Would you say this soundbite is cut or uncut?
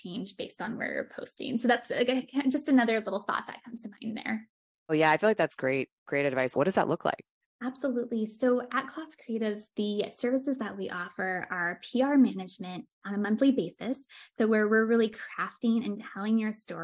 cut